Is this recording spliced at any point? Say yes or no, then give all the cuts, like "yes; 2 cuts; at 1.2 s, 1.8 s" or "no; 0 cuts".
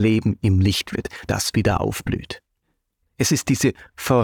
yes; 2 cuts; at 1.3 s, 3.0 s